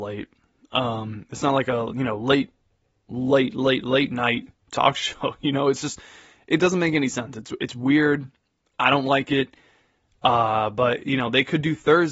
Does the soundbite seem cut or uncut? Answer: uncut